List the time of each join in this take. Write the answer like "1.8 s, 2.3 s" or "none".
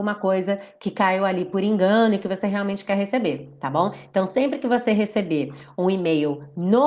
none